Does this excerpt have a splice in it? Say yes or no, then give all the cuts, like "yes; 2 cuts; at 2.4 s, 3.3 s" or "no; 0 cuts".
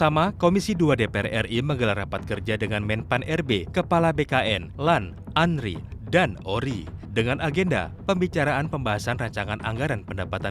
yes; 1 cut; at 4.8 s